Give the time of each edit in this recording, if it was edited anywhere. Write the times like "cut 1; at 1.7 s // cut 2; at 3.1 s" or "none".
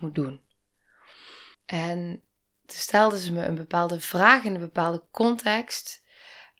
cut 1; at 1.5 s